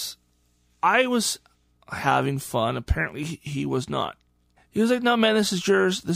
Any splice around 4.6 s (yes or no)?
yes